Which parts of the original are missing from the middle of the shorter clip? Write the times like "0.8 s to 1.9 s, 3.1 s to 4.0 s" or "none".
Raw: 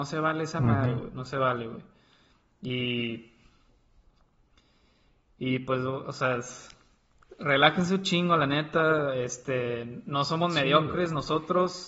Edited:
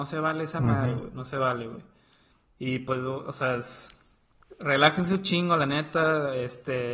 2.4 s to 5.2 s